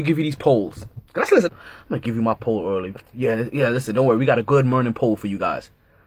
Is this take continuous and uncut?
no; 1 cut; at 1.5 s

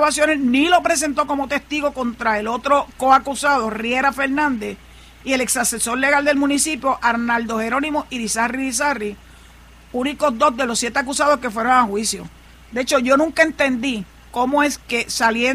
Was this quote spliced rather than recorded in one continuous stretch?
no; 0 cuts

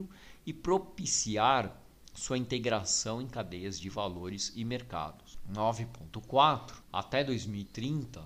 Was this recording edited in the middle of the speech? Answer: no; 0 cuts

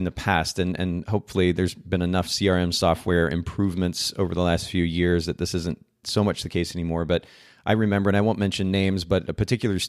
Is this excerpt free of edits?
yes; 0 cuts

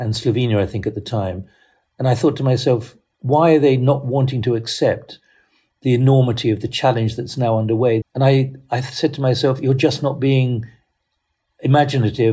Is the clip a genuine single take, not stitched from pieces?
no; 1 cut; at 8.0 s

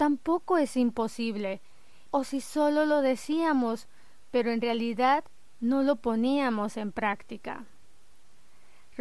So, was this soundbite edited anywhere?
yes; 1 cut; at 2.1 s

